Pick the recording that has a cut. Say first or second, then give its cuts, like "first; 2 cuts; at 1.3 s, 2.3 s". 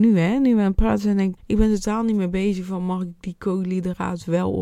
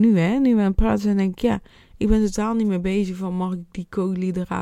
first; 1 cut; at 1.4 s